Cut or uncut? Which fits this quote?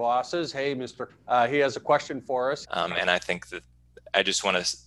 cut